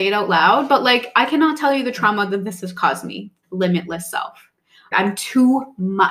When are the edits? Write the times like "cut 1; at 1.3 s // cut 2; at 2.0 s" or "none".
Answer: cut 1; at 3.4 s // cut 2; at 4.9 s